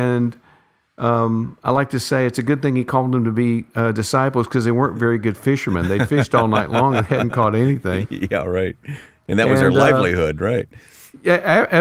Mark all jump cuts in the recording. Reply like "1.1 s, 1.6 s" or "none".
none